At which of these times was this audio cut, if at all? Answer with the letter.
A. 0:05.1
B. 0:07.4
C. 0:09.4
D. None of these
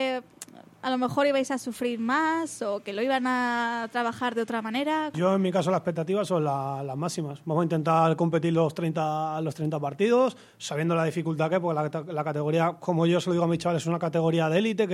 A